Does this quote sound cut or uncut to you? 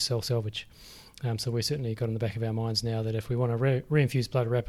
uncut